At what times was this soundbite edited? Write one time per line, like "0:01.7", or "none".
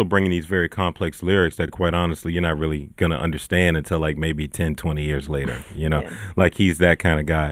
none